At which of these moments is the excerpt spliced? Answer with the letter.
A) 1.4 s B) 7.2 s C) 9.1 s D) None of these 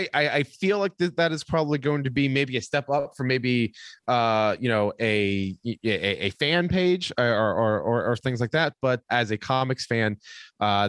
C